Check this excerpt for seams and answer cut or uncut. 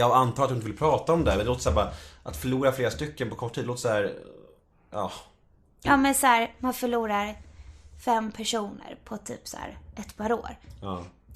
uncut